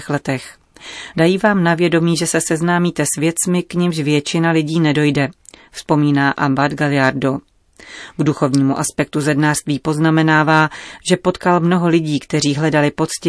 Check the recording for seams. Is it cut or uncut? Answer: cut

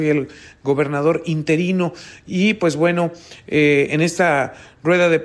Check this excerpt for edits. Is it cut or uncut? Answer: uncut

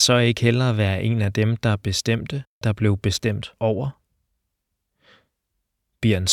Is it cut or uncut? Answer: cut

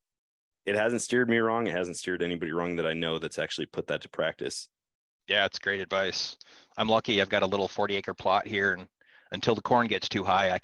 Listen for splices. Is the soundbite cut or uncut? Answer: uncut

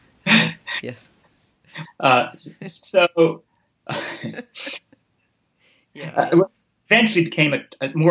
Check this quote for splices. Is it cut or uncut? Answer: cut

